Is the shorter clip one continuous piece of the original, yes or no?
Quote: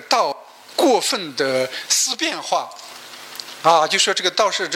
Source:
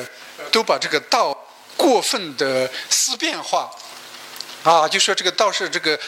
yes